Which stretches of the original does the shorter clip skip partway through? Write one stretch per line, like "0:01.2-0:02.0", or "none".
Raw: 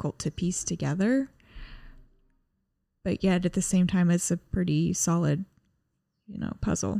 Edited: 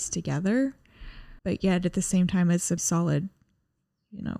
0:01.9-0:03.0
0:04.4-0:04.9